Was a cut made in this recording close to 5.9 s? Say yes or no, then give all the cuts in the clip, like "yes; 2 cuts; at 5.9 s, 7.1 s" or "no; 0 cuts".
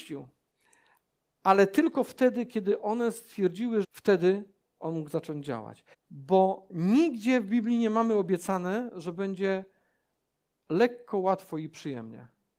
yes; 2 cuts; at 3.8 s, 5.9 s